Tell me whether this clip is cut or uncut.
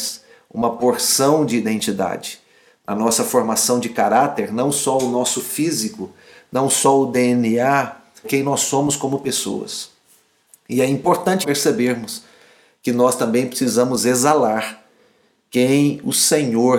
cut